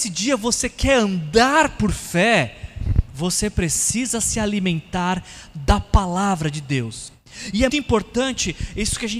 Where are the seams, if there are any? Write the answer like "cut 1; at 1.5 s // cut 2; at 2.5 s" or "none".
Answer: cut 1; at 7.7 s